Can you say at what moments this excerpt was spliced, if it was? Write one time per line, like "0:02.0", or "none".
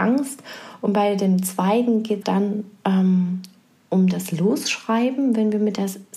0:02.2